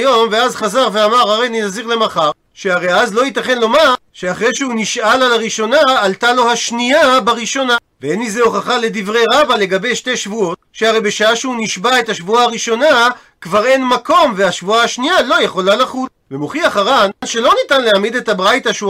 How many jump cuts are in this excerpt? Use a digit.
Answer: 2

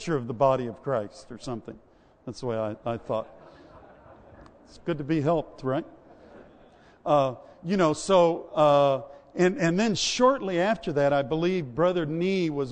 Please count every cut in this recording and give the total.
0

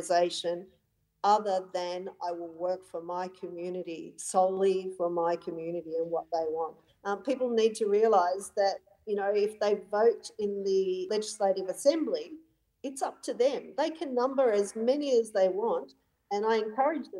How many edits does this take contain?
1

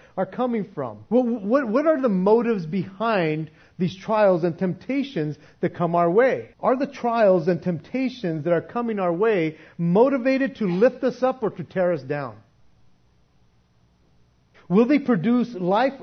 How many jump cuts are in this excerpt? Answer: 3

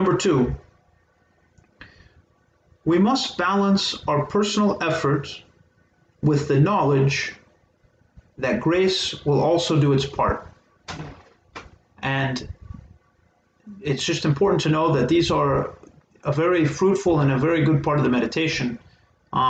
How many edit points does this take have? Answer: 1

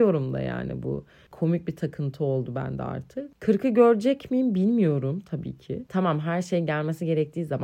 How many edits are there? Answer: 1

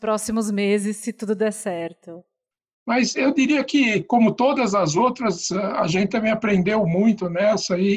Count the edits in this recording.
1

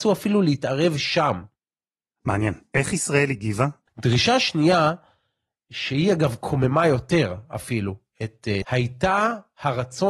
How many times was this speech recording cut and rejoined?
2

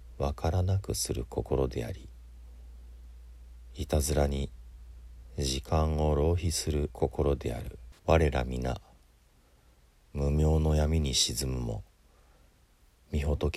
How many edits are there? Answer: 2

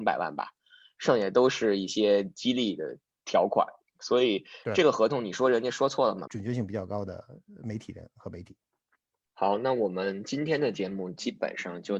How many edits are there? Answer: 1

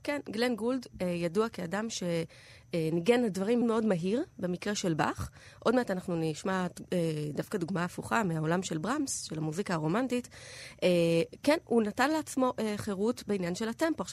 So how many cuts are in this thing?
1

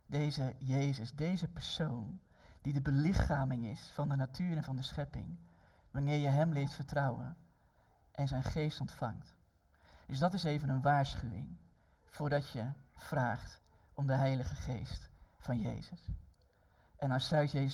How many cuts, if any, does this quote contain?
0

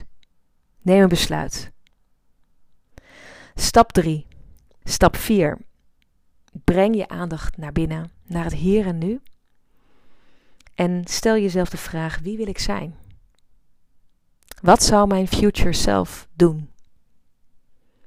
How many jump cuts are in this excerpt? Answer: 1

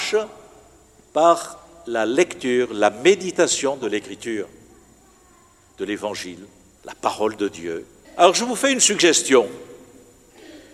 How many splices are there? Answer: 2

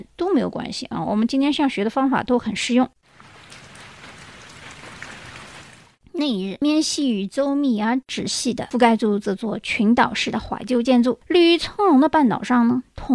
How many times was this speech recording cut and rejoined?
1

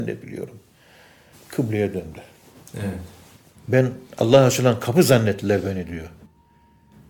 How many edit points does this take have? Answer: 2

